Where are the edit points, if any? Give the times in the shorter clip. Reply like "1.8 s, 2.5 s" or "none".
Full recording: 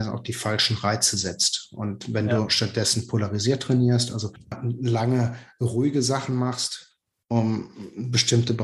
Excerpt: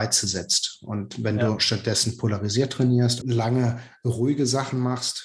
3.2 s

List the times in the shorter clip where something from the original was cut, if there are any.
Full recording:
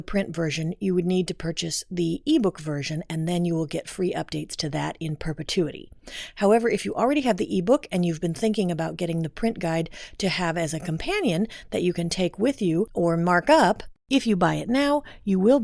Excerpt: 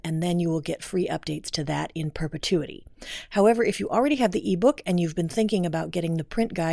none

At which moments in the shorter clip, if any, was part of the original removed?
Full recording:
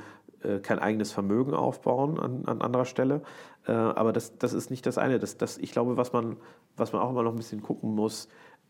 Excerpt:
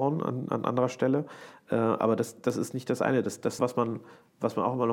3.6 s

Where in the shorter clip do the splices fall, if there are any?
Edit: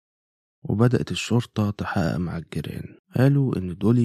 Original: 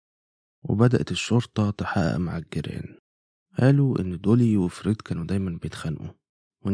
3.0 s

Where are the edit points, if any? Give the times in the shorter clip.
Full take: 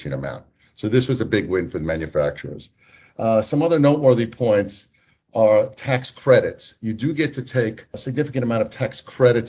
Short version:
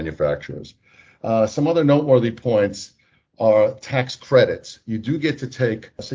none

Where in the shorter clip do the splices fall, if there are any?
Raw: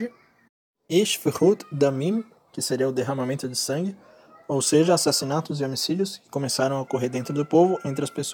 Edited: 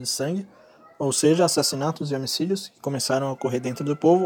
none

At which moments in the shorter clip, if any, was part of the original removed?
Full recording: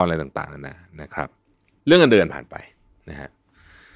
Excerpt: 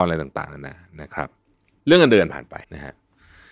2.6 s

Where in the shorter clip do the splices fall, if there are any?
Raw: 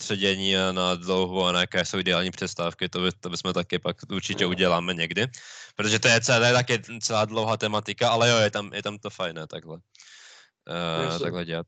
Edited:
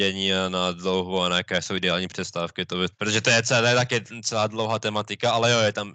2.9 s

